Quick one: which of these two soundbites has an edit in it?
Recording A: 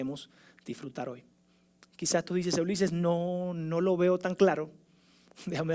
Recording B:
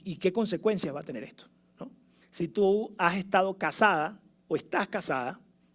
B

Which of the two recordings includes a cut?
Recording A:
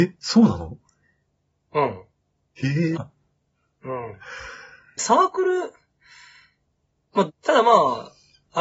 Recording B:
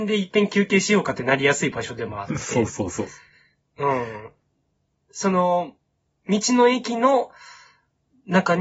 A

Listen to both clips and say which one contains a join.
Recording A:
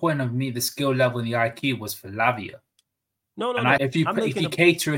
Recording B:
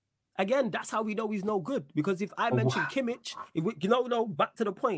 A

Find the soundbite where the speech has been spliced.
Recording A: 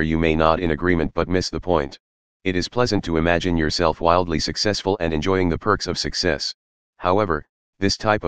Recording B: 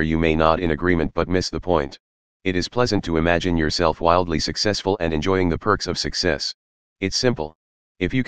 B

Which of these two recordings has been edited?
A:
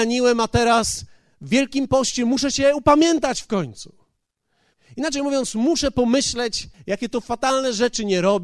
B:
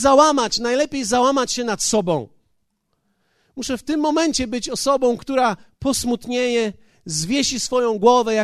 A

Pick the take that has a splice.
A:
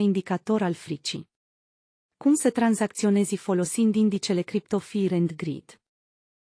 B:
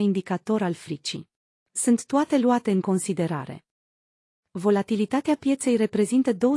B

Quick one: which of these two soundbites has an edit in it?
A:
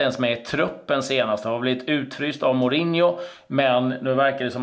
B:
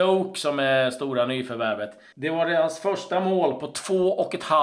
B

